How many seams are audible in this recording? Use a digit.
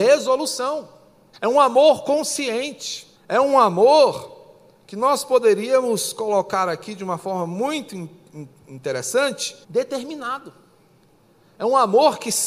3